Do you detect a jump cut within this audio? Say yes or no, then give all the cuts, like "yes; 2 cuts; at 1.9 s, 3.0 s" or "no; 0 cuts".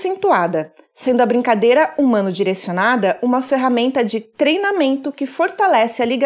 no; 0 cuts